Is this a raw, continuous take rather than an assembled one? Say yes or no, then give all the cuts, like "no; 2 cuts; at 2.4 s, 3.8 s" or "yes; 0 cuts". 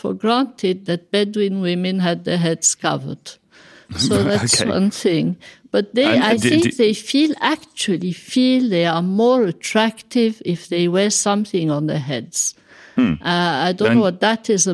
yes; 0 cuts